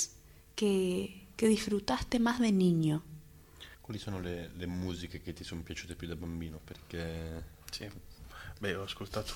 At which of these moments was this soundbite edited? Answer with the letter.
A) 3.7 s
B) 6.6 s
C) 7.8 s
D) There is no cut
A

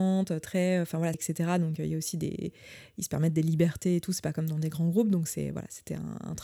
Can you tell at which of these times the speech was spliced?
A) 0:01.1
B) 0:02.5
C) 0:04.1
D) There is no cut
A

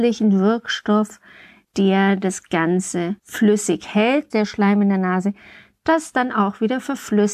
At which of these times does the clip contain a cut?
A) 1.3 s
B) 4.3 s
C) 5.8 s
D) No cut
B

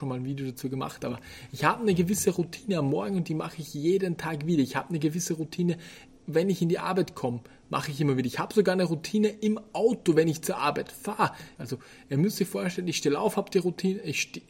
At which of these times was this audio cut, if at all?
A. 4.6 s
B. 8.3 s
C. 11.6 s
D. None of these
C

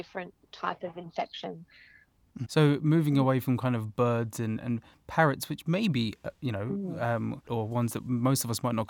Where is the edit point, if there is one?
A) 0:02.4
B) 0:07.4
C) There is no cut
A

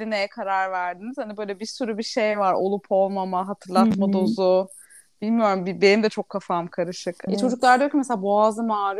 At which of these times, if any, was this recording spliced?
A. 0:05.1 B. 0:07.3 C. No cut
B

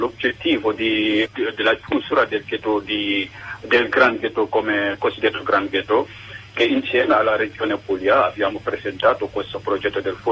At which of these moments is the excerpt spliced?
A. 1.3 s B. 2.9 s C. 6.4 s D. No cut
A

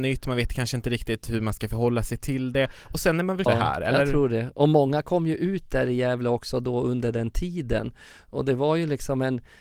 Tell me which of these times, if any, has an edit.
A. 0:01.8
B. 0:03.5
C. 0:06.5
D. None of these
B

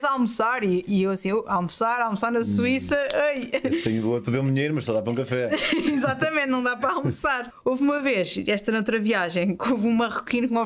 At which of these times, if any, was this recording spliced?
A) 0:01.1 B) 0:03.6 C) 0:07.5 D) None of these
C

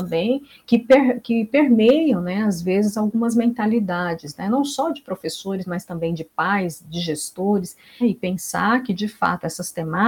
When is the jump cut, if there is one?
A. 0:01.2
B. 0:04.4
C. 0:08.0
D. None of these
C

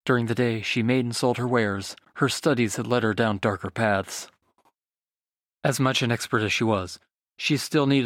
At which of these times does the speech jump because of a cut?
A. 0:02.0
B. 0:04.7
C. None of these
A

